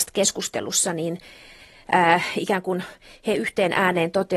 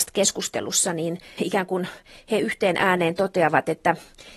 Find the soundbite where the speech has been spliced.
second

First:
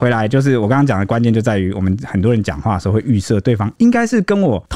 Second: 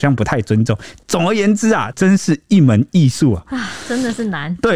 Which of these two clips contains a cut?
second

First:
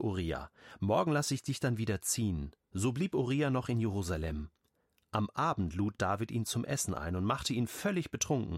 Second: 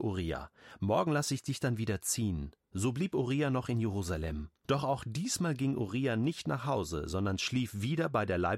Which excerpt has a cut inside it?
second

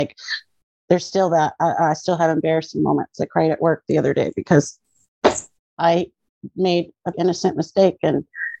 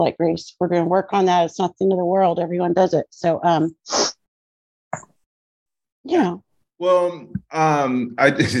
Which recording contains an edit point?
first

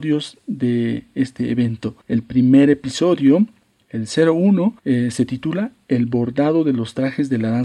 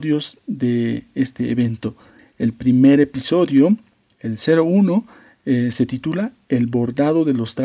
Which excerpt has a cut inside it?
first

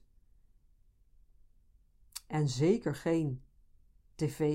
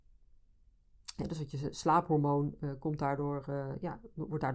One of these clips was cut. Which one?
second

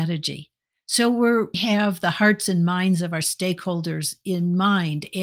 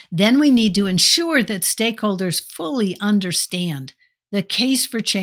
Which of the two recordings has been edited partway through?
first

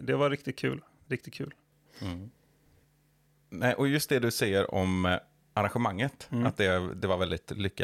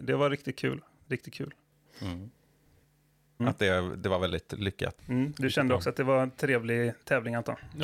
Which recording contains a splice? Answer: second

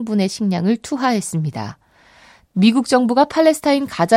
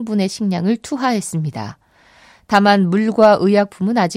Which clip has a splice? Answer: first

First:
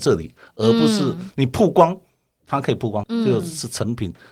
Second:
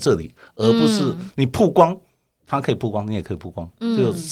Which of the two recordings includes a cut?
first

